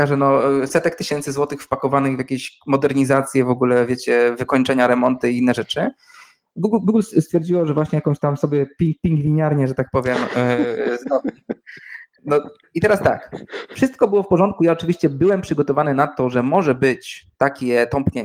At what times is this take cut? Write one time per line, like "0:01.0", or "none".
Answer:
none